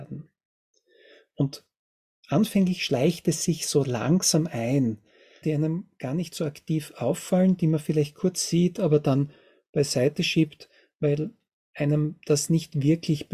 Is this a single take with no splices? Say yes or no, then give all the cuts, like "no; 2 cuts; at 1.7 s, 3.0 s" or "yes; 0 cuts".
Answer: no; 1 cut; at 5.4 s